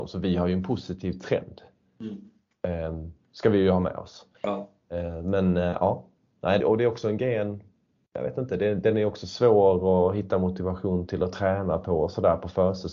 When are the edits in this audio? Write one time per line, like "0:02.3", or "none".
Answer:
0:04.3
0:06.6